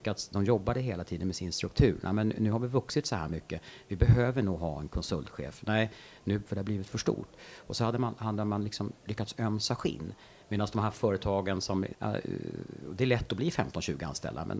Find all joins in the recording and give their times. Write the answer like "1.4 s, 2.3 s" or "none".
6.5 s, 11.9 s